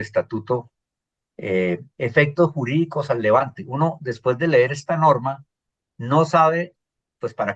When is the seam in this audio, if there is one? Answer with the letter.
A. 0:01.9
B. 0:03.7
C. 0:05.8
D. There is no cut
A